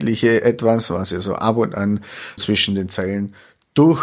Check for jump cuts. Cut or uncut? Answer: cut